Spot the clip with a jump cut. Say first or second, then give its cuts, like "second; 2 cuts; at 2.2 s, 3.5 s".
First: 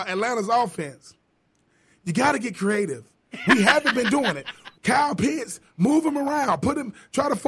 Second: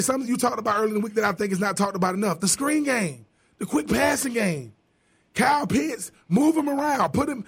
first; 2 cuts; at 3.3 s, 4.7 s